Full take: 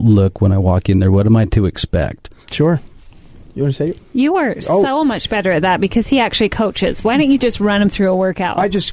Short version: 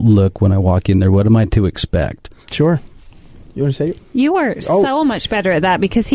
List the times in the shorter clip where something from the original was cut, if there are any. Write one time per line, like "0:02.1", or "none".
none